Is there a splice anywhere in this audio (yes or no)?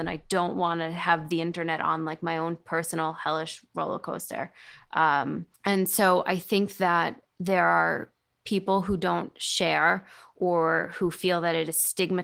yes